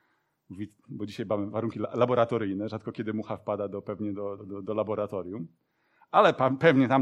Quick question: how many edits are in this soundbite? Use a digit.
1